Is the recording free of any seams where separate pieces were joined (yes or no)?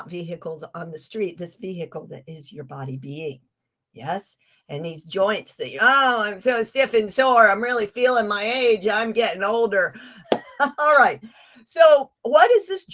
no